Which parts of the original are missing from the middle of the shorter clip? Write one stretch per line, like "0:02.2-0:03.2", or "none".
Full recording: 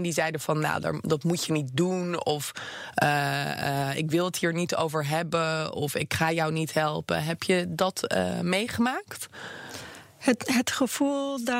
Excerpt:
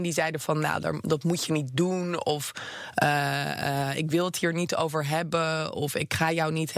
none